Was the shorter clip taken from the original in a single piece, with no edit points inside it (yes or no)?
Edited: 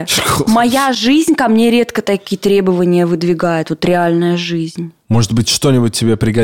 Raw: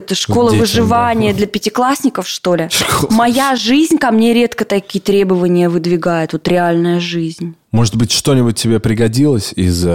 yes